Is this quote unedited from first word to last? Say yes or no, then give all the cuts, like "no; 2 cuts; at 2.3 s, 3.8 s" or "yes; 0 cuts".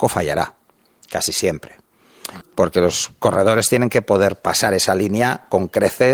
no; 1 cut; at 2.4 s